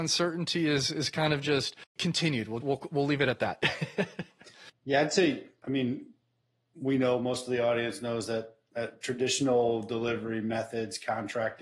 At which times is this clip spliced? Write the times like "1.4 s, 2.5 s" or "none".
2.6 s